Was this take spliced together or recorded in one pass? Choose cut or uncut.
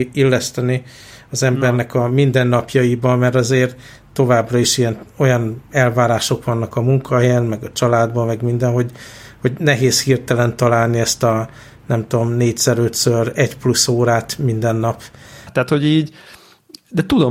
cut